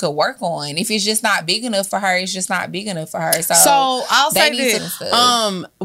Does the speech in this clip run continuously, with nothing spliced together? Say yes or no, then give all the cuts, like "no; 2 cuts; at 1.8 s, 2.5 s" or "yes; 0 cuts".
no; 1 cut; at 4.8 s